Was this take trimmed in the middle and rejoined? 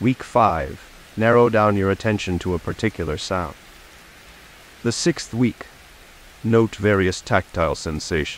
no; 0 cuts

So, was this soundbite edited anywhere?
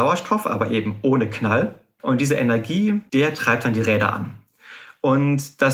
yes; 2 cuts; at 2.0 s, 3.1 s

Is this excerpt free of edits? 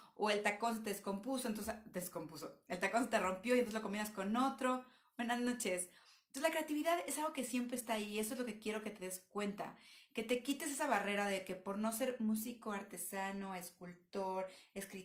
yes; 0 cuts

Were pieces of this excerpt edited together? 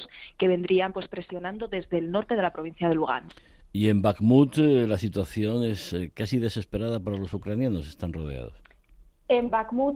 no; 0 cuts

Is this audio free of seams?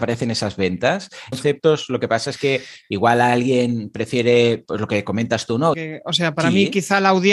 no; 2 cuts; at 1.3 s, 5.7 s

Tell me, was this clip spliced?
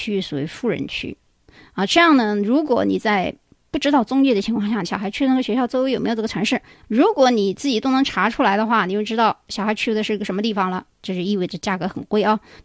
yes; 3 cuts; at 4.8 s, 6.8 s, 10.9 s

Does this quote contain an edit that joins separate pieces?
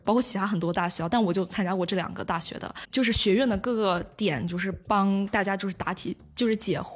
yes; 1 cut; at 2.8 s

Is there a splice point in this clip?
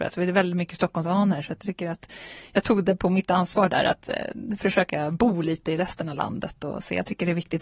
no; 0 cuts

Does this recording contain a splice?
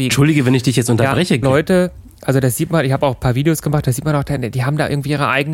yes; 1 cut; at 1.4 s

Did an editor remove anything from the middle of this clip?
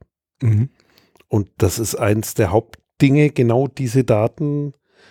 no; 0 cuts

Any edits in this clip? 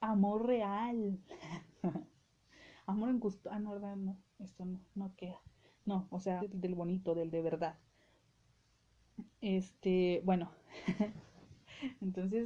yes; 1 cut; at 6.4 s

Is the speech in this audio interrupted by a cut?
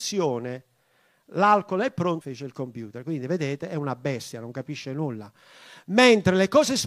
yes; 1 cut; at 2.2 s

